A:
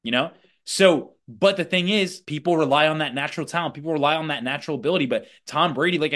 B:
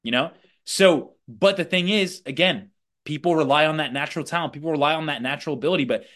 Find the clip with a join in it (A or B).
A